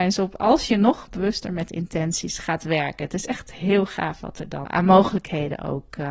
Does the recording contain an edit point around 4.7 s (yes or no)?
yes